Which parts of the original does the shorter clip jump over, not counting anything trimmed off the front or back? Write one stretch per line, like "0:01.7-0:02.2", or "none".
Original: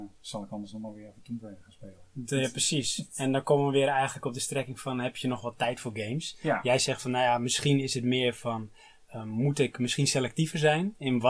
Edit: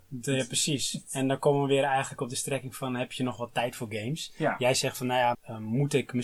0:07.4-0:09.0